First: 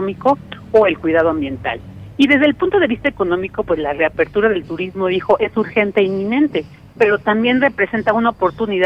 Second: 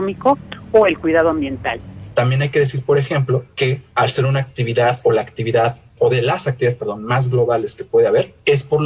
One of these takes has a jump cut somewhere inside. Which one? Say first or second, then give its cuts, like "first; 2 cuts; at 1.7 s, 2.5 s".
second; 1 cut; at 2.1 s